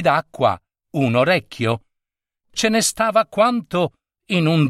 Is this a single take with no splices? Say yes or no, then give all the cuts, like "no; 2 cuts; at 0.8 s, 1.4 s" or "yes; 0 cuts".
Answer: yes; 0 cuts